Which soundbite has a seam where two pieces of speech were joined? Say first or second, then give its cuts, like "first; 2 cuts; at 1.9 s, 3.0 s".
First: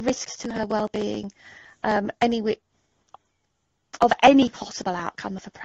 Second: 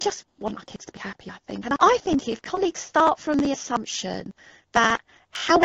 second; 1 cut; at 1.8 s